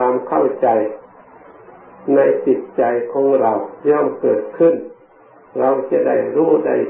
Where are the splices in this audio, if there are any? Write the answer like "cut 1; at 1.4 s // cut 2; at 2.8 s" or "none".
cut 1; at 3.8 s